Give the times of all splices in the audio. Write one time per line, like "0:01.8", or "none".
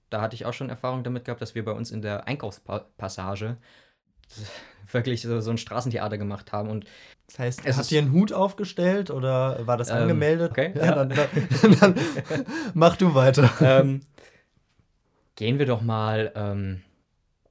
0:07.1
0:10.5